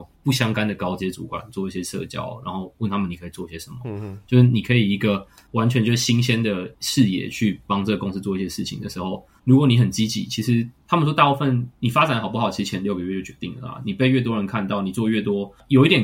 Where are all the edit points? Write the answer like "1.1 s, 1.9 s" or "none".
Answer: none